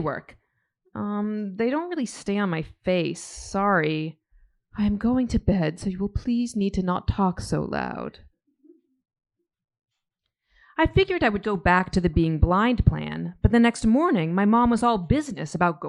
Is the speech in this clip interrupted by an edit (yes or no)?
yes